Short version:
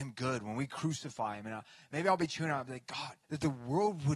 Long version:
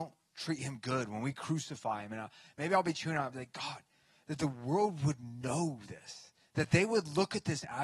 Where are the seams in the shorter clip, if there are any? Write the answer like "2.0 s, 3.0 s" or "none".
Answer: 3.2 s